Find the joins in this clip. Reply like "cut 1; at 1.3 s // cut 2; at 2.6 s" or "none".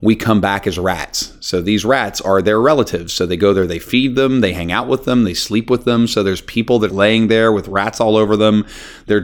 cut 1; at 5.2 s // cut 2; at 6.9 s